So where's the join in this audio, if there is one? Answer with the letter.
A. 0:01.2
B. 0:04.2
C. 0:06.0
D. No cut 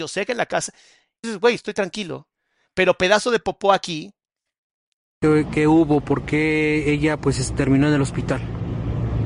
A